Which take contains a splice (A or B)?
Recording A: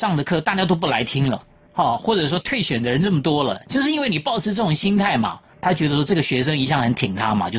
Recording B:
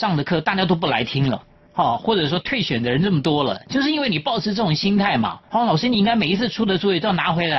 B